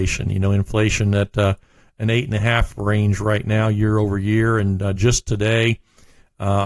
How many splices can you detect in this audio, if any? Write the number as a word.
zero